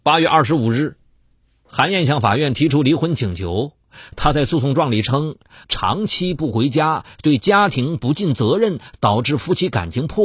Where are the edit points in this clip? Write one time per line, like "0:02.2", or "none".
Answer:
0:05.6